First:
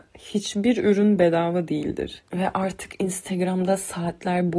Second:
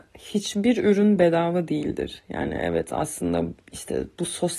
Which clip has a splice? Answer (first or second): first